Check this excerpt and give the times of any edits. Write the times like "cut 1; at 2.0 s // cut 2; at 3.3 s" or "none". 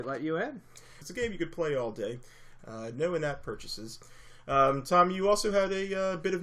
cut 1; at 1.0 s // cut 2; at 2.6 s